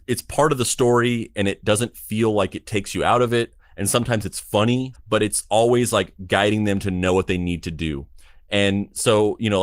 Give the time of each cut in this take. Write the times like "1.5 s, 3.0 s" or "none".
4.9 s